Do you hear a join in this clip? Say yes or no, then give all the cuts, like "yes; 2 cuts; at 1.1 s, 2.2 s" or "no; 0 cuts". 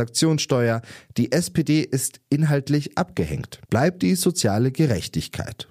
yes; 1 cut; at 3.7 s